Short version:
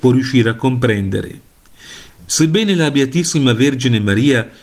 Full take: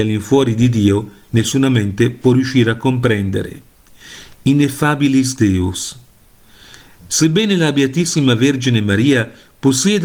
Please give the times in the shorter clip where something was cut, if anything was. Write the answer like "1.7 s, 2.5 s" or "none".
2.1 s